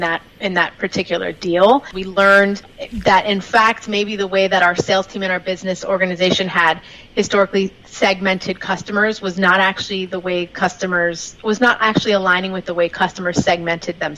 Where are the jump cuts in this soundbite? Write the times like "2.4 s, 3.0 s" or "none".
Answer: 1.9 s